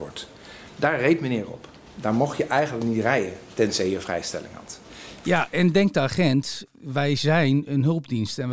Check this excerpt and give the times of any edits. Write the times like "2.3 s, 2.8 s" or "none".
5.2 s, 6.6 s